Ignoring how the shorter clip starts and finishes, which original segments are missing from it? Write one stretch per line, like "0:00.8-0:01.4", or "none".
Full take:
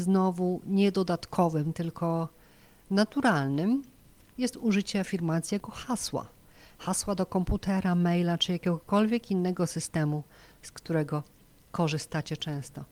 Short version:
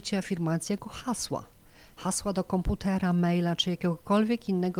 none